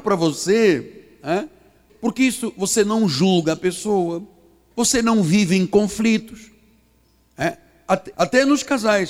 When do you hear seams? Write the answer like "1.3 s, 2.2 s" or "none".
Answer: 1.9 s, 4.7 s, 8.1 s